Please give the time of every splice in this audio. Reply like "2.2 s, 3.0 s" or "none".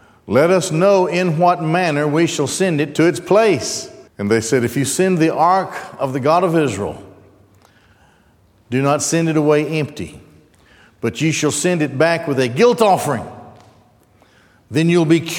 4.1 s